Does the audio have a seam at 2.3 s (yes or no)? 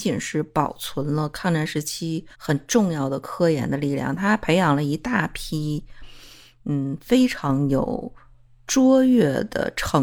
yes